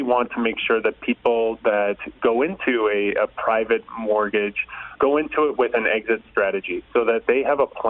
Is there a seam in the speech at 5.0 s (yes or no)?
yes